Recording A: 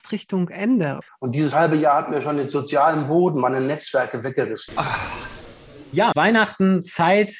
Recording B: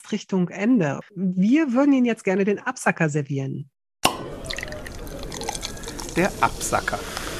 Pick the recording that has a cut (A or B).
A